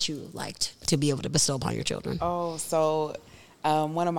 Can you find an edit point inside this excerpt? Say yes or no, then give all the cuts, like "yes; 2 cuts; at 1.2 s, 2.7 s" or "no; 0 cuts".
no; 0 cuts